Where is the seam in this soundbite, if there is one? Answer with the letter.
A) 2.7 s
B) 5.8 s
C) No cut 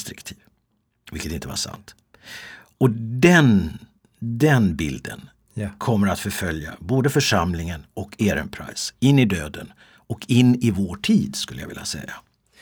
C